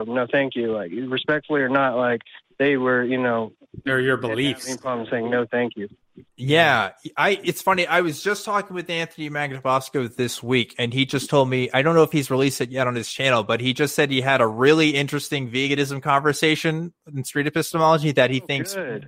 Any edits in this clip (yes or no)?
no